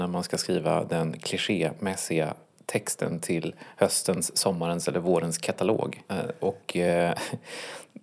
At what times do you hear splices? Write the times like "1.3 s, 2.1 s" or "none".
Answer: 6.0 s